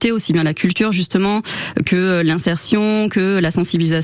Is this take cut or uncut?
uncut